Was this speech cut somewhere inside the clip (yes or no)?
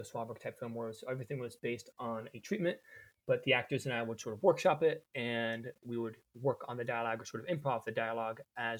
no